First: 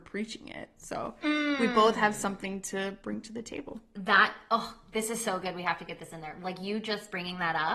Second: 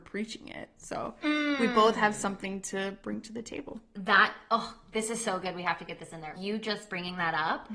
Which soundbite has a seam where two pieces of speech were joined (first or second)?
second